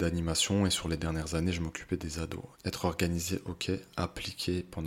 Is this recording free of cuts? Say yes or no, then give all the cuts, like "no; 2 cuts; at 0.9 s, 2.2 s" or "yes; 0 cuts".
no; 1 cut; at 2.5 s